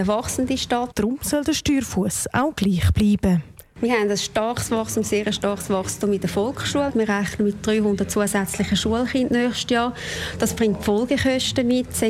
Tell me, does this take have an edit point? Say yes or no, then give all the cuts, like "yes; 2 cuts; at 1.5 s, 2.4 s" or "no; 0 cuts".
yes; 3 cuts; at 0.9 s, 3.7 s, 6.9 s